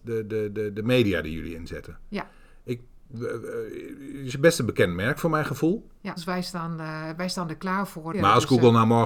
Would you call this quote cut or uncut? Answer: cut